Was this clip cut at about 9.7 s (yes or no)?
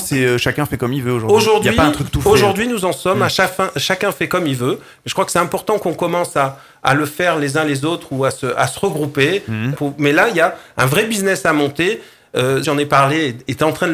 yes